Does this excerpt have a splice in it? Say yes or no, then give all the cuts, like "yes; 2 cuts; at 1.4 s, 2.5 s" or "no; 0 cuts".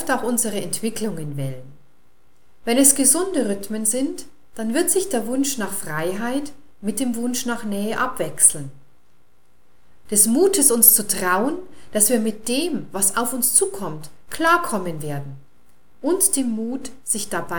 yes; 1 cut; at 10.1 s